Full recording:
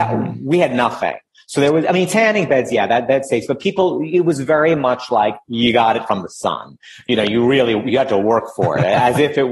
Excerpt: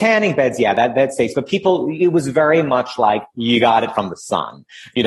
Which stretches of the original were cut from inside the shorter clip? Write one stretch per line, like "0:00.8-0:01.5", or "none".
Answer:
none